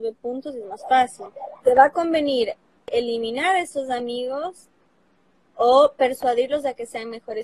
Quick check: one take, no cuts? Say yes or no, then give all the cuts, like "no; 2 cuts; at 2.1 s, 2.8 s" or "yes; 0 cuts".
no; 1 cut; at 1.6 s